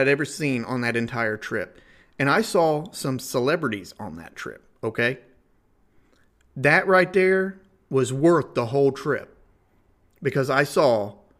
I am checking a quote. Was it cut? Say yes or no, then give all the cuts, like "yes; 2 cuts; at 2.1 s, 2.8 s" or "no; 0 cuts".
no; 0 cuts